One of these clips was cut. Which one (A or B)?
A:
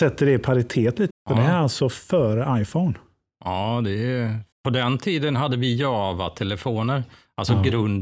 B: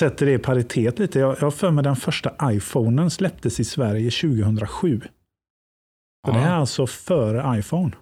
A